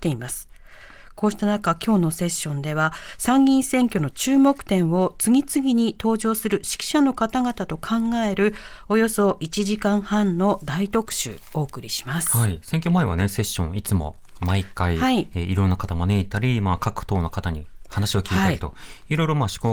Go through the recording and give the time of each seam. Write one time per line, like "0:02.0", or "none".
none